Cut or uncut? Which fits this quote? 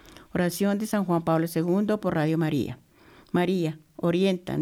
uncut